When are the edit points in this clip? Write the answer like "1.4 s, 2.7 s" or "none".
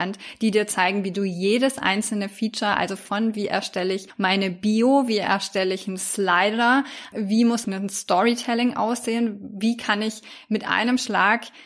7.6 s